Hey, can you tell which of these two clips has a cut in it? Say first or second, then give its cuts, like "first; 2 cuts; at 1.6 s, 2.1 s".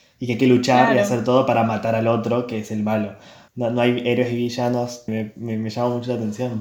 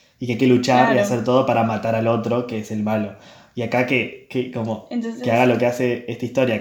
first; 2 cuts; at 3.5 s, 5.1 s